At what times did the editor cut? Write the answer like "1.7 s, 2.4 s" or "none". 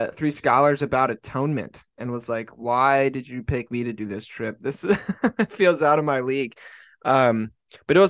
none